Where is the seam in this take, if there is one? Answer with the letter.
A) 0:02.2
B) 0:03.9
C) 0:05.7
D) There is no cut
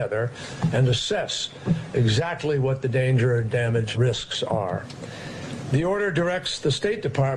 B